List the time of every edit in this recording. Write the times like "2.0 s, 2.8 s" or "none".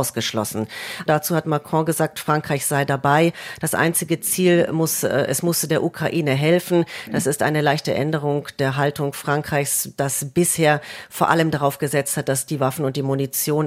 1.1 s